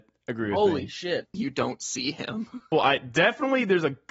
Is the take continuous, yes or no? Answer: no